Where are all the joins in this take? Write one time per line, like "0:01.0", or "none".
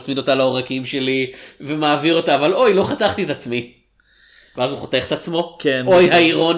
none